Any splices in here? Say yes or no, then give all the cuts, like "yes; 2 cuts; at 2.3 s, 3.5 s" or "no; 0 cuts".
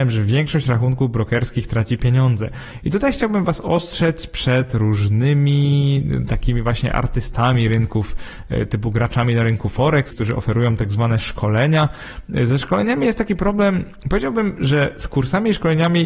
yes; 1 cut; at 10.1 s